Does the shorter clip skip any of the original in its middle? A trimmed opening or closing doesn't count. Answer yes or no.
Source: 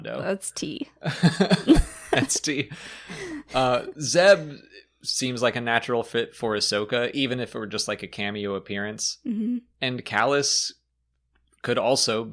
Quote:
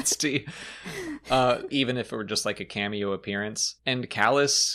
yes